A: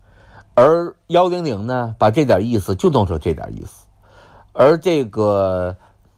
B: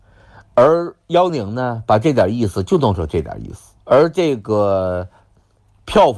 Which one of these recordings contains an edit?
B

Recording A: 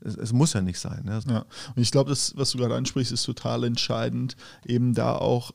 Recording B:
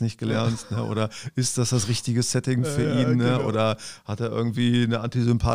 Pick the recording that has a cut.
A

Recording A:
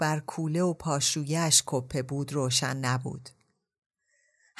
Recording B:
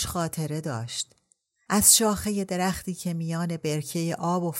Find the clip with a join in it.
B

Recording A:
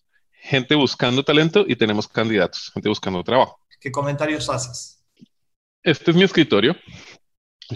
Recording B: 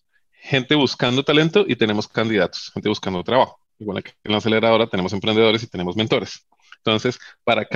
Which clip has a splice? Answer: A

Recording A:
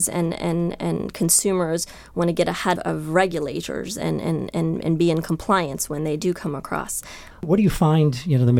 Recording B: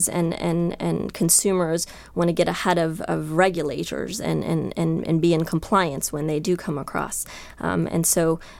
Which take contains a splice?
A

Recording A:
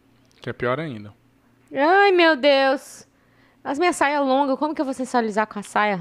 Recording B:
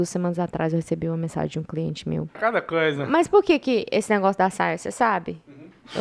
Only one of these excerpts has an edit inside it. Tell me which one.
B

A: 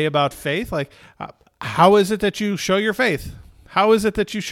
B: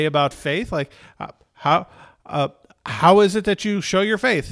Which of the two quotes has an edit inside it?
A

